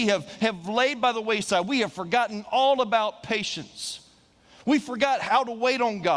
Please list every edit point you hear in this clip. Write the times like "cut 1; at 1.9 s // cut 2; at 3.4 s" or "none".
none